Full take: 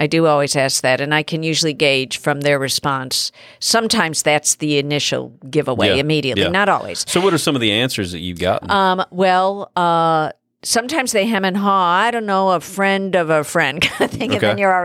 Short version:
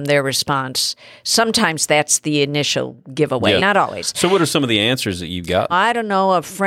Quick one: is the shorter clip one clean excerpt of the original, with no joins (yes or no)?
no